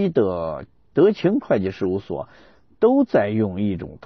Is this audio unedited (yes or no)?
yes